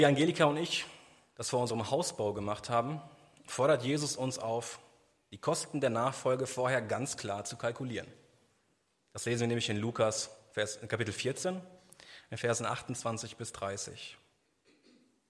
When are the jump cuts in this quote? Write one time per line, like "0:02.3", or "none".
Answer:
none